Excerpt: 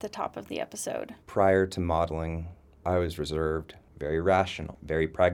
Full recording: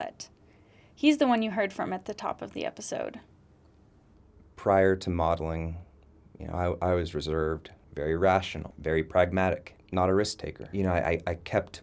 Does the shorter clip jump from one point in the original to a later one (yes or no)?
yes